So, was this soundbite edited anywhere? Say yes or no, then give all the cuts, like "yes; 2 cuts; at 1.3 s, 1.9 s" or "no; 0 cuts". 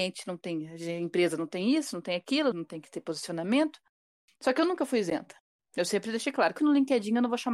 yes; 2 cuts; at 2.5 s, 6.6 s